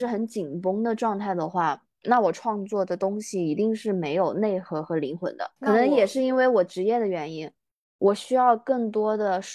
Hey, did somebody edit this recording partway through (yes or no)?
yes